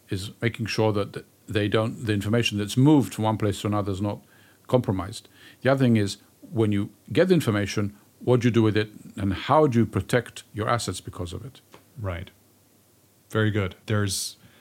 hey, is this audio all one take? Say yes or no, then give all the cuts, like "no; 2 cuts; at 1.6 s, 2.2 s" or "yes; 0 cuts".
yes; 0 cuts